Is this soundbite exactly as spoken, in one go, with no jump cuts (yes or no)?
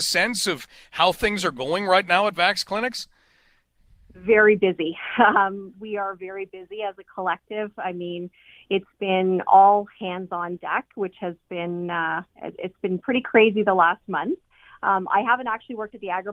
yes